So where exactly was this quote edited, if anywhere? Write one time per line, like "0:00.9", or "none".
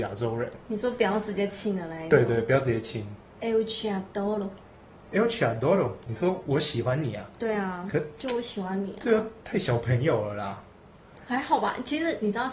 none